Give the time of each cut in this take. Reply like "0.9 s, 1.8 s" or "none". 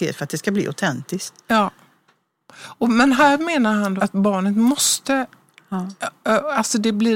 4.0 s